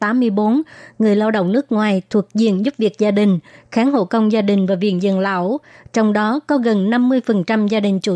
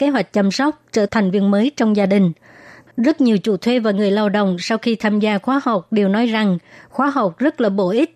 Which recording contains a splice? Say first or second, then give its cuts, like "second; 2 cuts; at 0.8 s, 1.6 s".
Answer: second; 2 cuts; at 1.1 s, 2.9 s